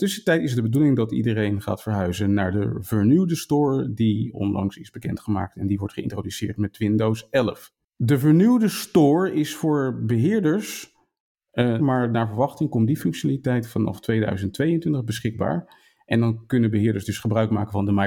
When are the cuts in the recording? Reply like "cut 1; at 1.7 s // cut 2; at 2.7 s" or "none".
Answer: cut 1; at 11.8 s

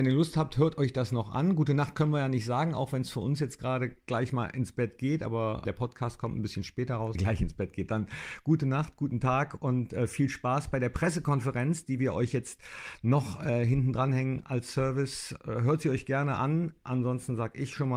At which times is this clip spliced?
cut 1; at 7.1 s

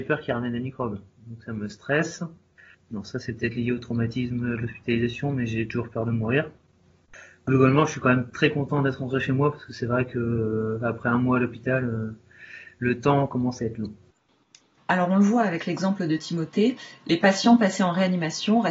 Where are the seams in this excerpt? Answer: cut 1; at 2.7 s

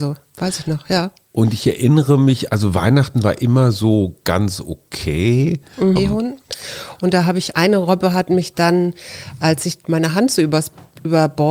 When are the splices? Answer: cut 1; at 6.0 s // cut 2; at 7.5 s

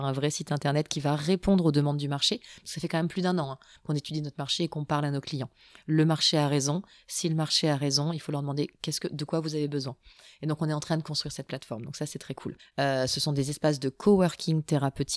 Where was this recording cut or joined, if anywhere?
cut 1; at 12.6 s

